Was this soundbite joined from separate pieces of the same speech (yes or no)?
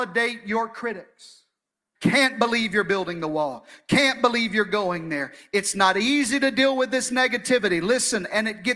yes